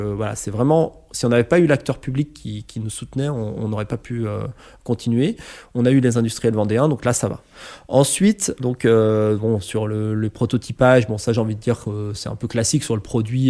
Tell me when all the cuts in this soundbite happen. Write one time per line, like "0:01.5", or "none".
0:08.6